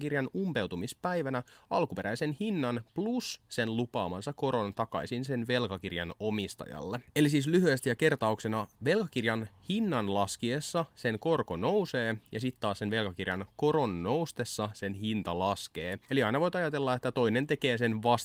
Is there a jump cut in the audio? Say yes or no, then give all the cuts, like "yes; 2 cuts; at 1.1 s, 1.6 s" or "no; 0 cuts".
no; 0 cuts